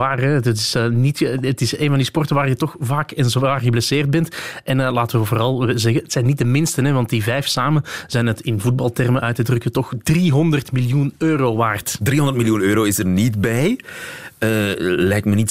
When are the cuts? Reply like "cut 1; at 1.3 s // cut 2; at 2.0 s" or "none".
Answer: none